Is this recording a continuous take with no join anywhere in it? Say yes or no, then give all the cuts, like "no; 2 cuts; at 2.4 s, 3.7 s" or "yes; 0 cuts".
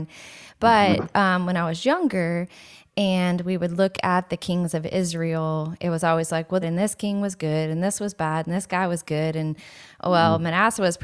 no; 1 cut; at 6.6 s